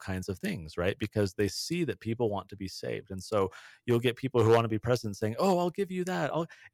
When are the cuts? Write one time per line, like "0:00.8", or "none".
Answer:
none